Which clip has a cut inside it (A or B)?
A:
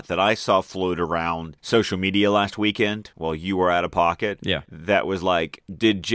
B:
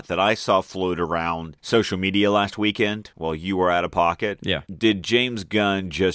B